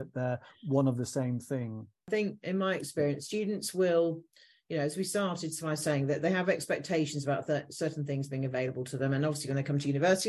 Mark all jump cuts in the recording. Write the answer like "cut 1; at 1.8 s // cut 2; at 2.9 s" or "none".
none